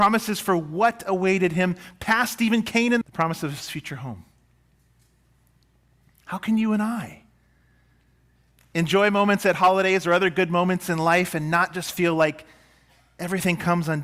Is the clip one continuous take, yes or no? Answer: no